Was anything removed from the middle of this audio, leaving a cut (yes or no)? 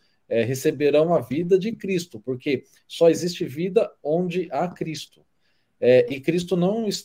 no